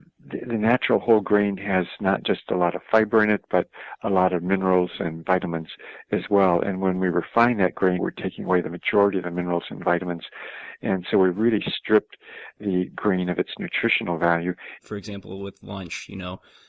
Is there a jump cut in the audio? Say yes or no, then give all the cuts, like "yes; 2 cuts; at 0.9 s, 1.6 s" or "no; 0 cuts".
yes; 2 cuts; at 8.0 s, 14.8 s